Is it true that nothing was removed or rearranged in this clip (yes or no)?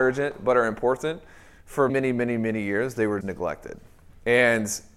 no